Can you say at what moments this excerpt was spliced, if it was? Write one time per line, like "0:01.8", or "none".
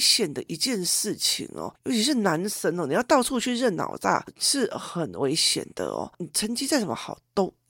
none